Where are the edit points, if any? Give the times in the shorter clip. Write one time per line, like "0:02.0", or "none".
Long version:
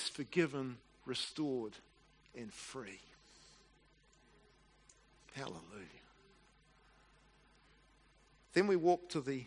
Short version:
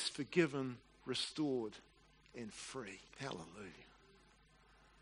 0:03.1